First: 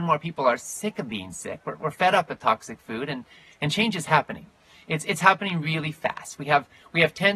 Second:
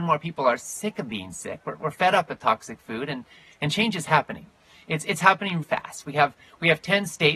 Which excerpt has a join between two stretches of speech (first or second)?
second